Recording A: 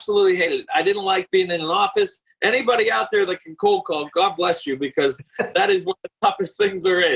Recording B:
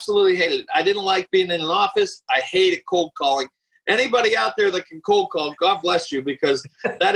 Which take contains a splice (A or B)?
A